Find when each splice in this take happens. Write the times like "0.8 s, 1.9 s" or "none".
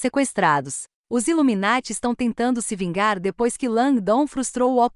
0.9 s